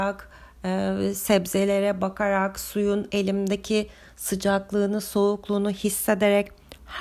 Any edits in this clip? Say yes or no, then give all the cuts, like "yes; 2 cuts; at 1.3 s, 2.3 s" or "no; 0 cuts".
no; 0 cuts